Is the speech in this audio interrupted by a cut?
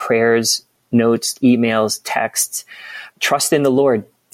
yes; 2 cuts; at 1.4 s, 3.1 s

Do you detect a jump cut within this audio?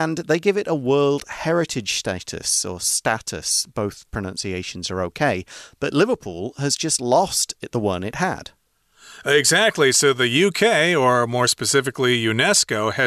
no; 0 cuts

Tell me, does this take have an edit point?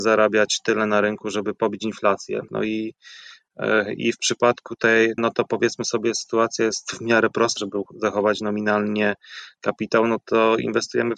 yes; 3 cuts; at 2.5 s, 5.2 s, 7.6 s

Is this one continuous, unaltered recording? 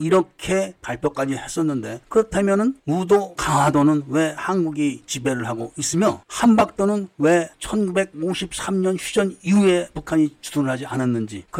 no; 1 cut; at 3.4 s

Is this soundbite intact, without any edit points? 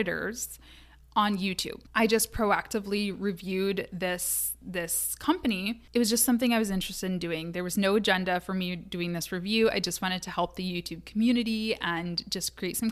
yes; 0 cuts

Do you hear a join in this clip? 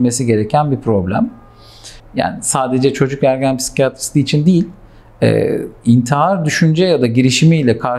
yes; 1 cut; at 2.0 s

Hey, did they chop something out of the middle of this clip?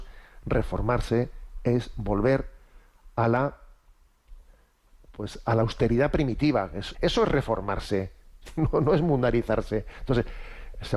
yes; 1 cut; at 6.9 s

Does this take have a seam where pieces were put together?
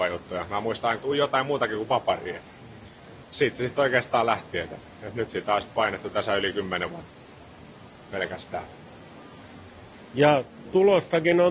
yes; 2 cuts; at 1.0 s, 3.1 s

